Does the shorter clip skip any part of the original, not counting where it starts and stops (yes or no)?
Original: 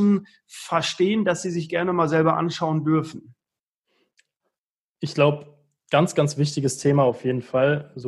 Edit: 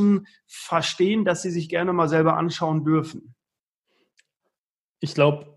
no